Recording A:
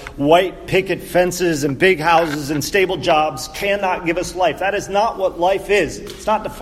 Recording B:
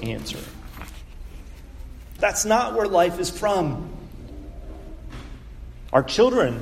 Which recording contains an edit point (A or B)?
B